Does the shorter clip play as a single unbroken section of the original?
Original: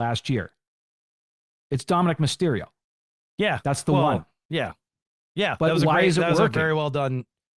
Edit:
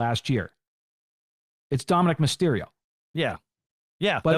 no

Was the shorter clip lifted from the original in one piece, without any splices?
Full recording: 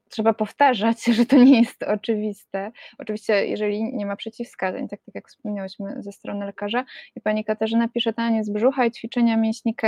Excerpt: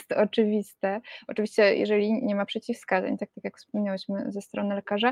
yes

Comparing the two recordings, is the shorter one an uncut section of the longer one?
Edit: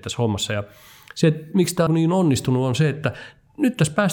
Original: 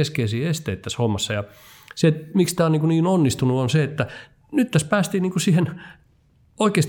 no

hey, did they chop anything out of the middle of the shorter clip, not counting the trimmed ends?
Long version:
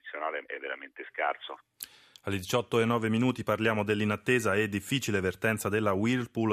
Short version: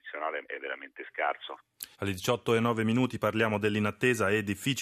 yes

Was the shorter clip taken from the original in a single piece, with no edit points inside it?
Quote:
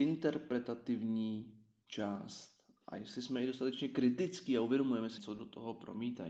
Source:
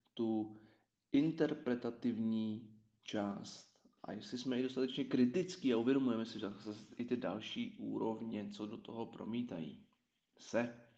no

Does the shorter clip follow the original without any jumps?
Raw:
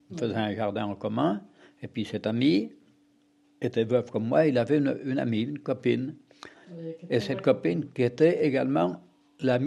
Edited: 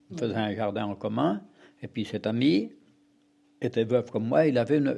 yes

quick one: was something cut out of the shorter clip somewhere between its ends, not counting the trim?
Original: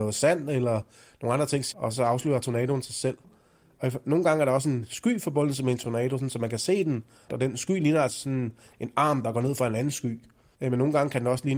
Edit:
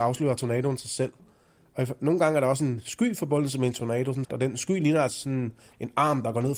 yes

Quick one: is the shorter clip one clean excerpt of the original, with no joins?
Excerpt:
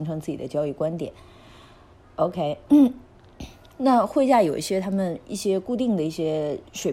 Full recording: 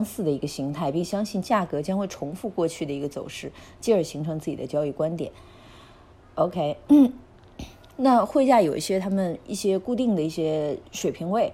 yes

